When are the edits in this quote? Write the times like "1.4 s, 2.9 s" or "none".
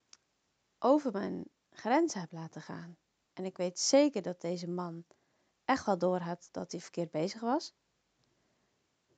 3.3 s